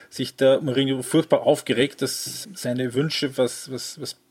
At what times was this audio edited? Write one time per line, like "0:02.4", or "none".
0:02.4